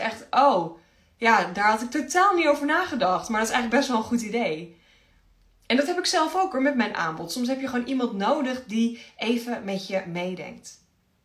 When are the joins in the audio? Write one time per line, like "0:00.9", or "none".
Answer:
none